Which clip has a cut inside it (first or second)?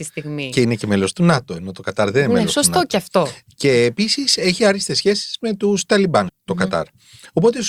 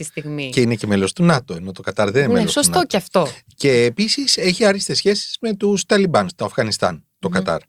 first